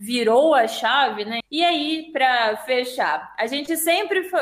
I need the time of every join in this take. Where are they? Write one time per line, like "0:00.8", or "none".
0:01.4